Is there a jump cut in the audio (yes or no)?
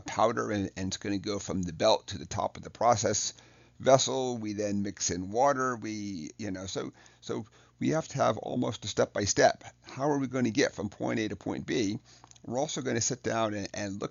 no